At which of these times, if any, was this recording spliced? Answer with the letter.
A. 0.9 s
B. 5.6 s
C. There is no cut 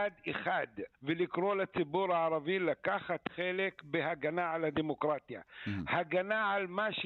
A